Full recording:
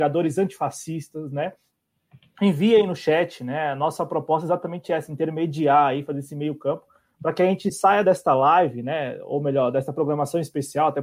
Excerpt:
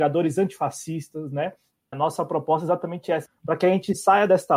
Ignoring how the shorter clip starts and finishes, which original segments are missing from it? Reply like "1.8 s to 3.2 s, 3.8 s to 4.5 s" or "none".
1.9 s to 3.7 s, 5.1 s to 7.0 s